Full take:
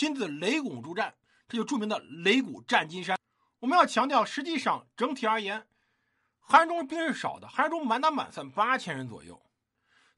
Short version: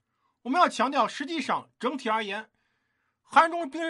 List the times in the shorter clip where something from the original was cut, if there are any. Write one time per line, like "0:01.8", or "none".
none